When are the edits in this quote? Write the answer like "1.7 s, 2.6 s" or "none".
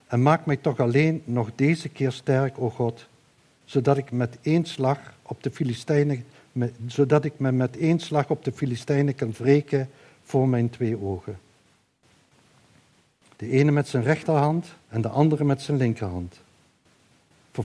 13.4 s, 14.8 s